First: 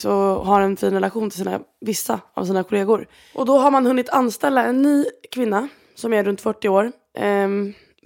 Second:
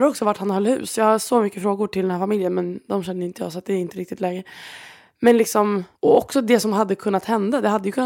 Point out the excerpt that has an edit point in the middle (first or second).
second